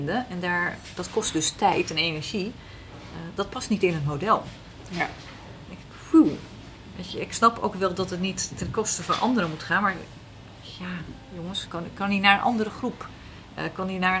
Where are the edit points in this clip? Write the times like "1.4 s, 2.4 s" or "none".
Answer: 11.7 s